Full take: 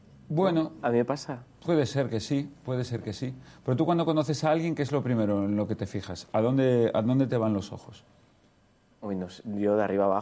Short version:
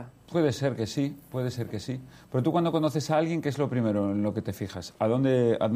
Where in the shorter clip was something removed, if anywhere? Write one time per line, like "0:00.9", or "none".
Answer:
none